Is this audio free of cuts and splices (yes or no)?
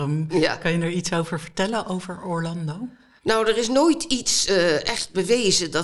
yes